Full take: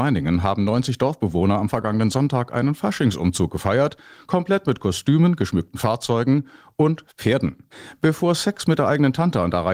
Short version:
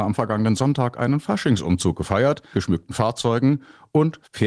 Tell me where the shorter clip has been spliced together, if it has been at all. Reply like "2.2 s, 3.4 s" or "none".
2.5 s

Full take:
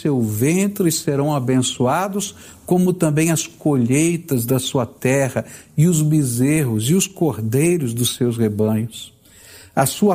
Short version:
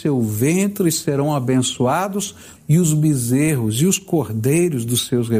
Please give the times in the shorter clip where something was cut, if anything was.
2.6 s

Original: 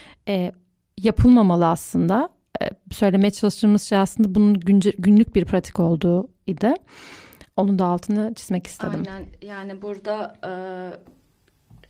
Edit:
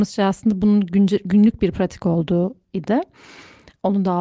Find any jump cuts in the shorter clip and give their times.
none

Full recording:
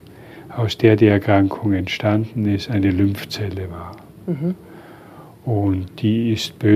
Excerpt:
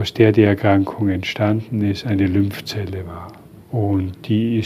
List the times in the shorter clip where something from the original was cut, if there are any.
3.6 s

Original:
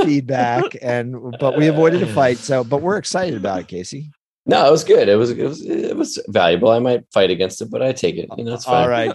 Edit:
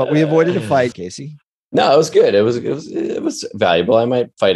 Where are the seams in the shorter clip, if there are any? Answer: 0.9 s

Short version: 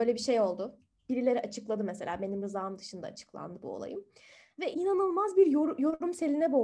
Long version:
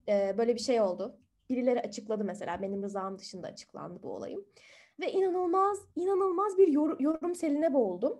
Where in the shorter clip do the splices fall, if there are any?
4.7 s

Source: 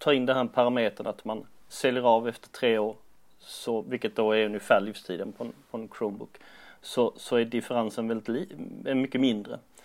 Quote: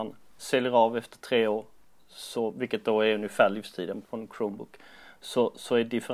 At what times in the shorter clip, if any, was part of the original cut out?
4.0 s

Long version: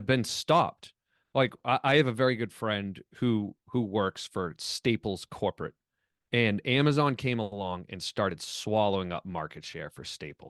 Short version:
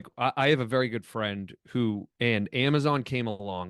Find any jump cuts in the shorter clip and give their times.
2.1 s

